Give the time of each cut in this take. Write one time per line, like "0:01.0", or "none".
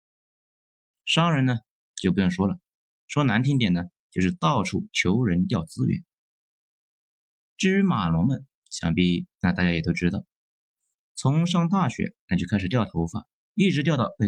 0:02.9